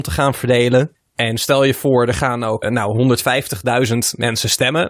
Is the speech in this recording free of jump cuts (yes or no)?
no